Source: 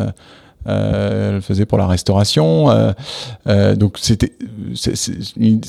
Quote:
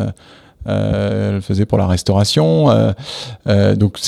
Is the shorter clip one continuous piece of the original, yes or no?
yes